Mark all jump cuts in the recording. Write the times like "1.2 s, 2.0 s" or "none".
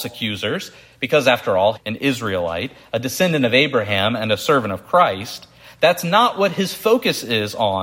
1.8 s